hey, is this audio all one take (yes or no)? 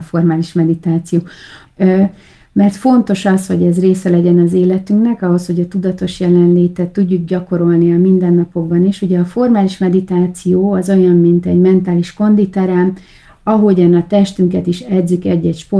no